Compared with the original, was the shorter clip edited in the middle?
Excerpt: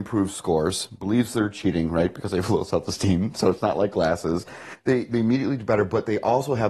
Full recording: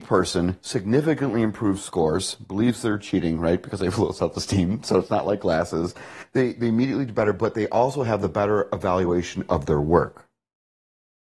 no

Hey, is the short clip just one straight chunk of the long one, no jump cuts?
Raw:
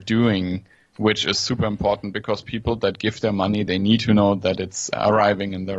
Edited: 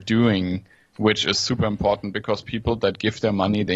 yes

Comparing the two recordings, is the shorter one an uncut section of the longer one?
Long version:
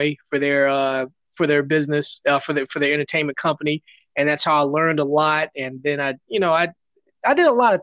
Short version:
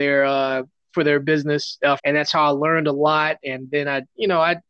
no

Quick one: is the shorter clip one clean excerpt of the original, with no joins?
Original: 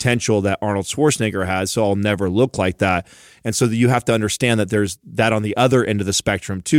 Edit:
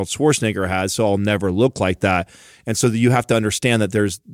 yes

